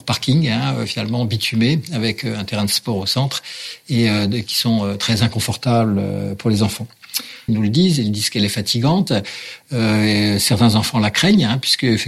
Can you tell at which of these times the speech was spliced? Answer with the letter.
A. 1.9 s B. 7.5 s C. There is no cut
B